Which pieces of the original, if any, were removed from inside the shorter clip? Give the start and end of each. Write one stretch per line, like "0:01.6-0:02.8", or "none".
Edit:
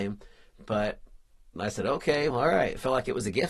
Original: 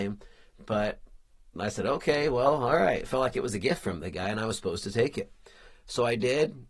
0:02.3-0:02.6